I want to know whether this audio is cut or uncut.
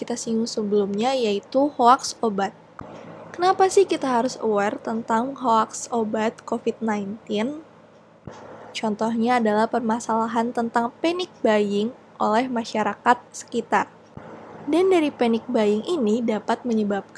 cut